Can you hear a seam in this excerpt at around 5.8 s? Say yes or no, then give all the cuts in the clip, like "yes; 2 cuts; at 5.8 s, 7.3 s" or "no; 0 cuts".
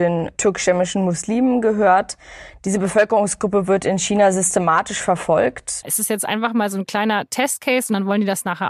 yes; 1 cut; at 5.8 s